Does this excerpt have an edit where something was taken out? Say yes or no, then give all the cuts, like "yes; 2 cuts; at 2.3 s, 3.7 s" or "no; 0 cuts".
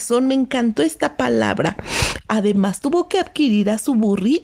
yes; 1 cut; at 2.3 s